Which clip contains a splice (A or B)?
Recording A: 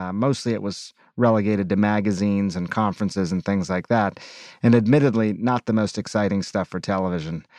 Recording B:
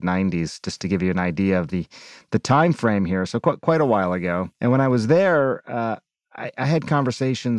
B